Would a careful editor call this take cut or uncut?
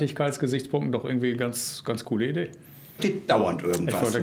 cut